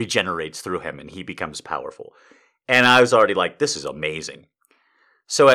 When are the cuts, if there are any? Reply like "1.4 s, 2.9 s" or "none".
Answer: none